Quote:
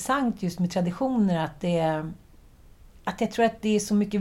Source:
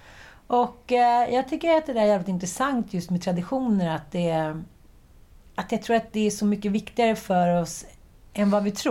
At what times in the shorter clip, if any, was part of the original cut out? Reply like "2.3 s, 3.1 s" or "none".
none